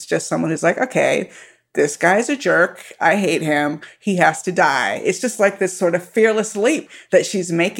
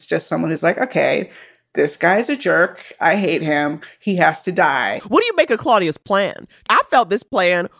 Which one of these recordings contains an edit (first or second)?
second